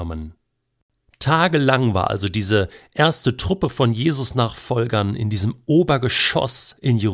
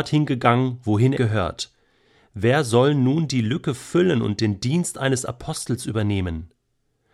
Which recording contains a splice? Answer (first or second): second